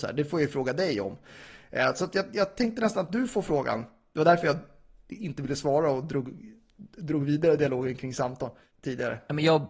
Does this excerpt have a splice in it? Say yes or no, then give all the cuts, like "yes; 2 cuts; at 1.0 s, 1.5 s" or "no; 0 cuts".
no; 0 cuts